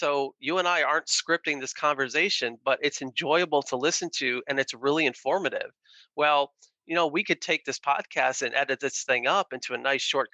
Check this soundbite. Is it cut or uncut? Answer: uncut